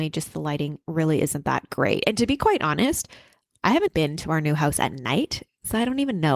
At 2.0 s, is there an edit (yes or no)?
no